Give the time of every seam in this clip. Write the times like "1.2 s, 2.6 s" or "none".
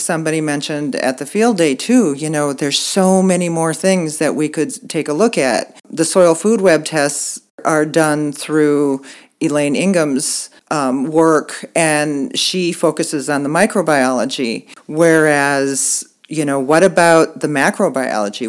10.6 s